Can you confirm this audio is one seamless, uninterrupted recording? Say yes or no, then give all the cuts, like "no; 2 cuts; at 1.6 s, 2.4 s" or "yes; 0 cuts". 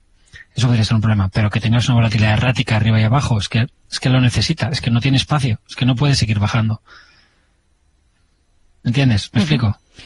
yes; 0 cuts